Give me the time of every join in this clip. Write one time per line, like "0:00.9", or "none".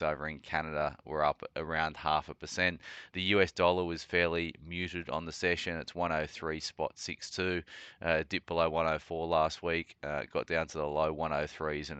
none